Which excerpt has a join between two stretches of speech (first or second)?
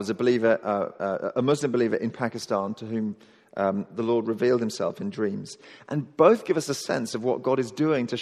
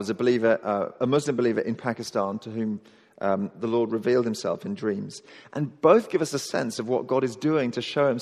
second